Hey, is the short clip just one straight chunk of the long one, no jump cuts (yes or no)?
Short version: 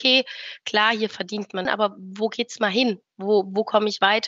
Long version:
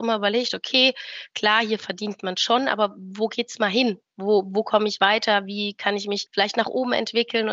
no